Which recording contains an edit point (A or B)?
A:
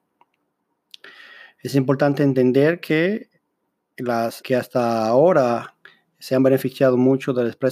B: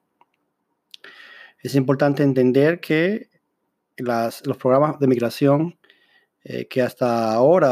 A